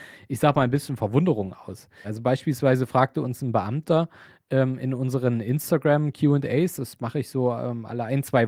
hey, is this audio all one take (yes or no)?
no